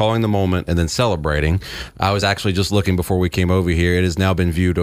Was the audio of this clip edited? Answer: no; 0 cuts

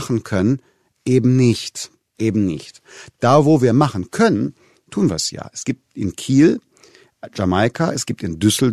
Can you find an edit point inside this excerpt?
no; 0 cuts

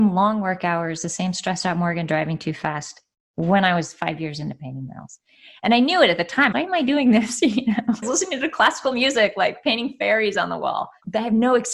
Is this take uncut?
no; 2 cuts; at 6.5 s, 8.0 s

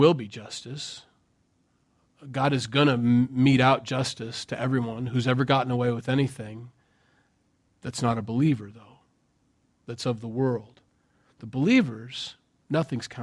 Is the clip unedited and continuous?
yes; 0 cuts

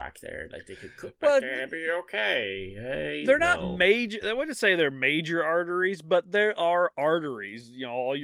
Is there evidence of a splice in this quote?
no; 0 cuts

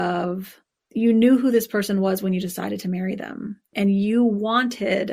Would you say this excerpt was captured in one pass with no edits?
yes; 0 cuts

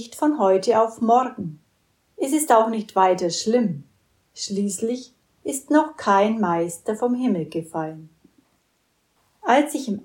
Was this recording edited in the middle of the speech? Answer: no; 0 cuts

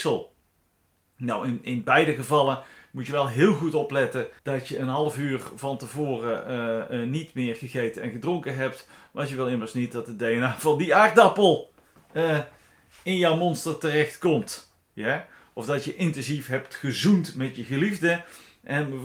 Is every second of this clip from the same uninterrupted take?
no; 1 cut; at 4.4 s

